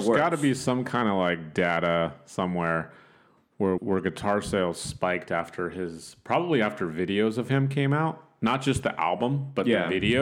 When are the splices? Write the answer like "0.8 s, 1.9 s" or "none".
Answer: 3.8 s